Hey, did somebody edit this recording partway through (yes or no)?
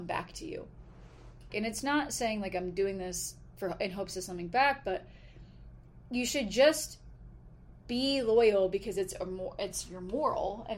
yes